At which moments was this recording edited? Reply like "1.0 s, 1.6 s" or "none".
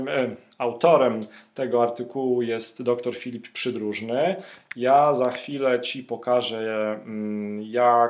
none